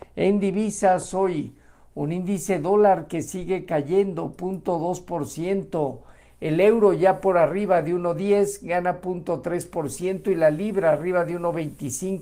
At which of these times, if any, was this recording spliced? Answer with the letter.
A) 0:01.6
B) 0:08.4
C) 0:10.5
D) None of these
D